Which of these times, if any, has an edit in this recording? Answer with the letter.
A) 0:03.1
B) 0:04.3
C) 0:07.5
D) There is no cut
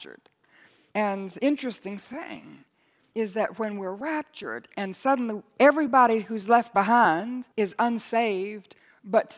C